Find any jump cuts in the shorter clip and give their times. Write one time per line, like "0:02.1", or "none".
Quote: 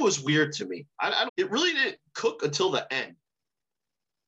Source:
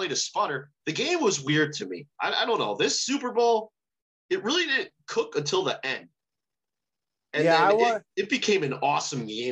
0:01.3